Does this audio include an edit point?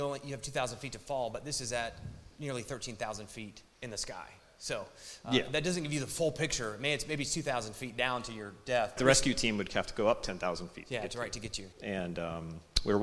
yes; 3 cuts; at 3.7 s, 9.0 s, 11.7 s

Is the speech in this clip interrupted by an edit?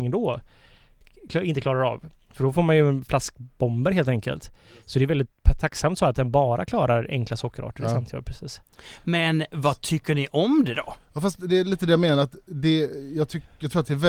no; 0 cuts

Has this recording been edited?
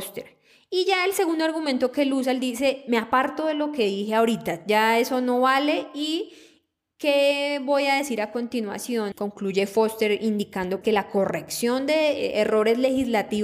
yes; 2 cuts; at 9.1 s, 10.8 s

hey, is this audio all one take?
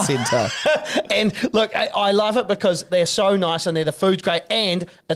yes; 0 cuts

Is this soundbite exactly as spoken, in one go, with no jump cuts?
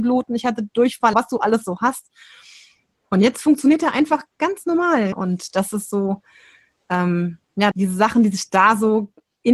no; 3 cuts; at 1.1 s, 5.1 s, 7.7 s

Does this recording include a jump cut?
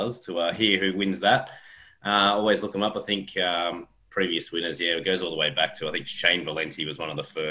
no; 0 cuts

